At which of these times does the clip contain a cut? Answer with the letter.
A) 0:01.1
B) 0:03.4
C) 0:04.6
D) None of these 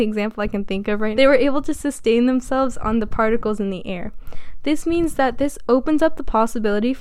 A